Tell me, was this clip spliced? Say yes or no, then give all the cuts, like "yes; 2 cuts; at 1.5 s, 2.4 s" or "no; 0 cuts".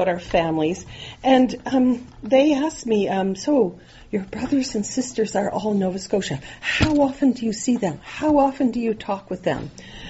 no; 0 cuts